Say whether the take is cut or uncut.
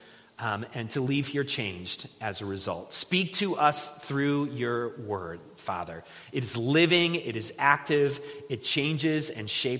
uncut